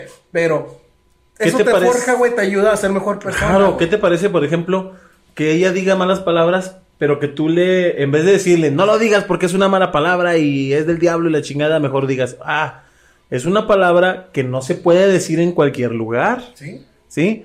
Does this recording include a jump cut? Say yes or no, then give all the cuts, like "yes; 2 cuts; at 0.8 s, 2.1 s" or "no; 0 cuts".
no; 0 cuts